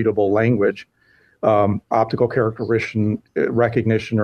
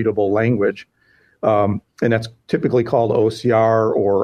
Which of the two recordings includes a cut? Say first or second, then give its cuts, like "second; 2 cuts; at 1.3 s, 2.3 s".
first; 1 cut; at 1.9 s